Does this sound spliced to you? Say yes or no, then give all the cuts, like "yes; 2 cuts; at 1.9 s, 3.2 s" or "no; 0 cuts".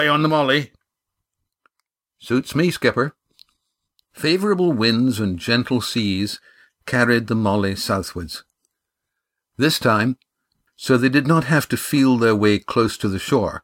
yes; 1 cut; at 10.7 s